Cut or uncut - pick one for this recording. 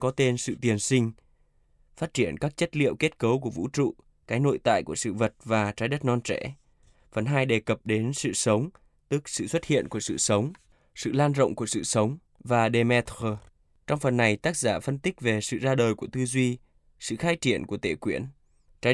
cut